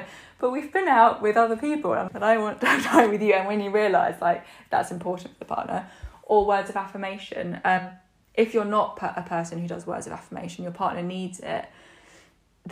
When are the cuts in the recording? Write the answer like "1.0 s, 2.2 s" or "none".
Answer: 2.1 s